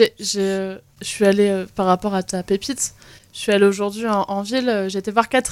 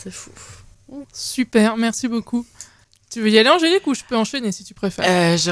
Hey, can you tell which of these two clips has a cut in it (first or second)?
second